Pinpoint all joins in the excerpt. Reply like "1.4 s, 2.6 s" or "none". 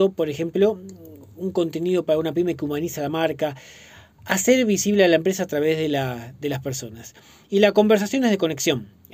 none